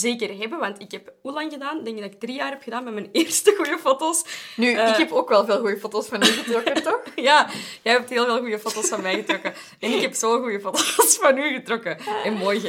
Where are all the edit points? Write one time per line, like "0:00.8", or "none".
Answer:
none

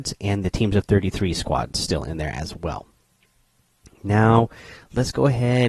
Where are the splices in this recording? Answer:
none

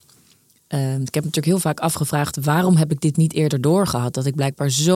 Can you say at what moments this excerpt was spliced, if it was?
none

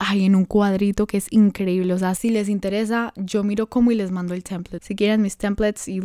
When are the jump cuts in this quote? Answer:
0:04.8

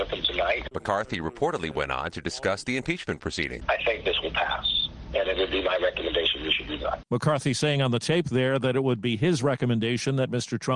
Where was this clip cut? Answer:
none

